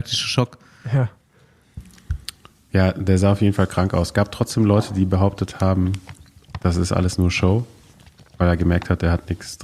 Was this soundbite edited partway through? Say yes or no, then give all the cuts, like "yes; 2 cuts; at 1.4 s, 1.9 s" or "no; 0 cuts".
no; 0 cuts